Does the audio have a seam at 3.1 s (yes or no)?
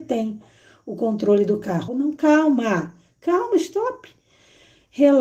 no